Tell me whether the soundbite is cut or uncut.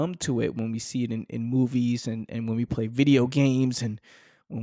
uncut